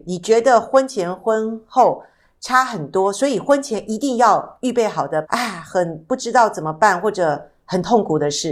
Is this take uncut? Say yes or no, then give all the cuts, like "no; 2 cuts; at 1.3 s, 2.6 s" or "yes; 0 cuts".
no; 1 cut; at 5.2 s